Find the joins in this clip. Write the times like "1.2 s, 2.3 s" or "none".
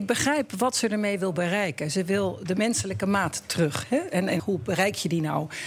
4.4 s